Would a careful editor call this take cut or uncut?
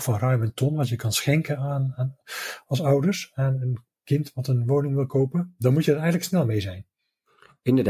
uncut